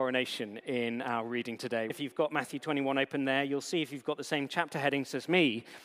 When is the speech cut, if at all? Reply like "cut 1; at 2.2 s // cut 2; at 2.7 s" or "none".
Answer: cut 1; at 1.9 s